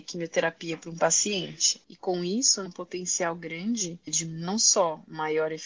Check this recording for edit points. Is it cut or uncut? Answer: cut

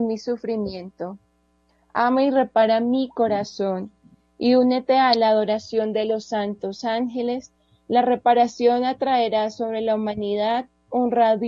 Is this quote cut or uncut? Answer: uncut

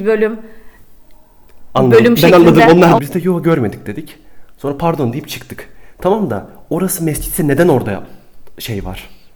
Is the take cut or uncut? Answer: cut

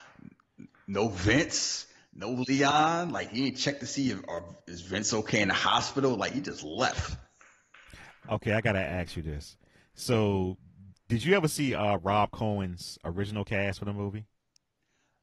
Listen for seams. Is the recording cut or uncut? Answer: uncut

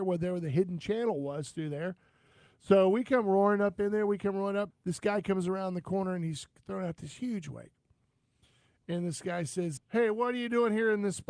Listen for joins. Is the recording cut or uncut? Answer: cut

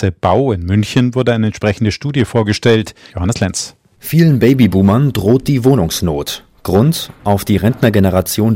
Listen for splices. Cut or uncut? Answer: cut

